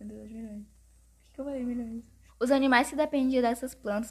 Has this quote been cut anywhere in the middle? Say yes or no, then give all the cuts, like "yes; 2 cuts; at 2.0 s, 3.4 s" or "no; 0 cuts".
yes; 1 cut; at 2.3 s